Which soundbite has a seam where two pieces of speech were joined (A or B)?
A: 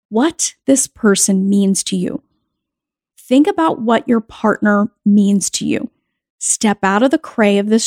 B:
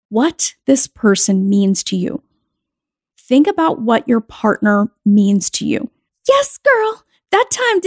B